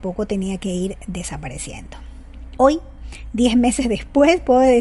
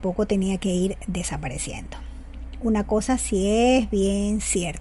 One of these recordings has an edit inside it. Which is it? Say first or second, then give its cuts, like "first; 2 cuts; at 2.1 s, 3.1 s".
first; 1 cut; at 2.6 s